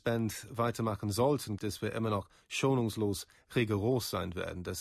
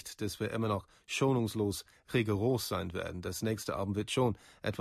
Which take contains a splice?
first; 1 cut; at 1.6 s

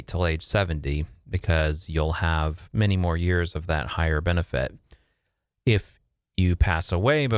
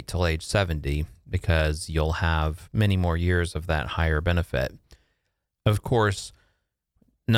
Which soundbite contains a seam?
second; 1 cut; at 5.5 s

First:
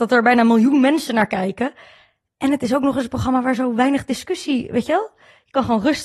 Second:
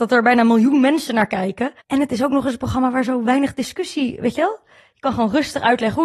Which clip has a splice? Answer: second; 1 cut; at 1.8 s

